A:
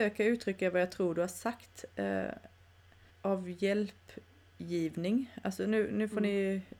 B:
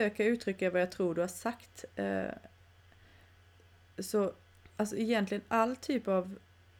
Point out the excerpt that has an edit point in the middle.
A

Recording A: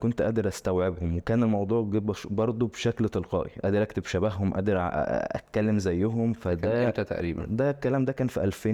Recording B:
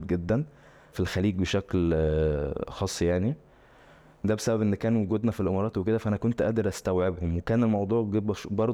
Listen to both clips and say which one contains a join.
B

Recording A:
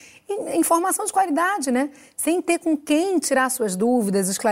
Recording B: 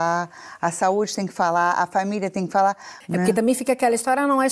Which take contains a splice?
B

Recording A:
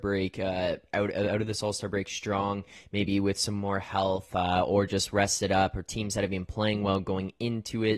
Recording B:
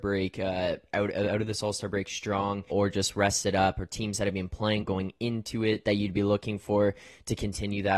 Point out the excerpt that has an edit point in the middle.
B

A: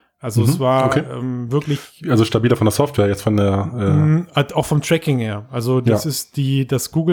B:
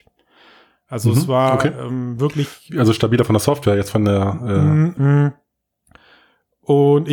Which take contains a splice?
B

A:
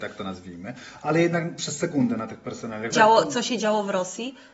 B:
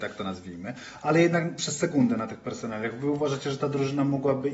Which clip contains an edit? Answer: A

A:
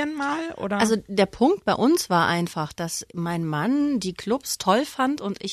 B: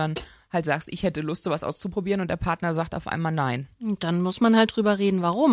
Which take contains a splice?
A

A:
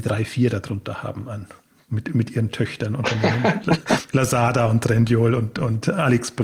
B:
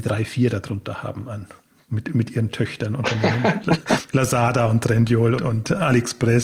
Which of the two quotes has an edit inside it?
B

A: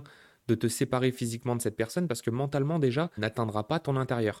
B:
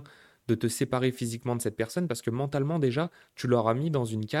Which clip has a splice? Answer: A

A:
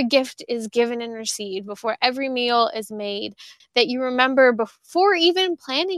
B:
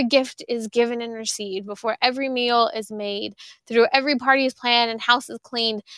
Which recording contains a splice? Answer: A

